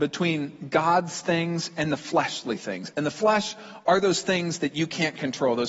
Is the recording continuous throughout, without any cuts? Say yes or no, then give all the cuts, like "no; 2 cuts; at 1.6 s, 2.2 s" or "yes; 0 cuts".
yes; 0 cuts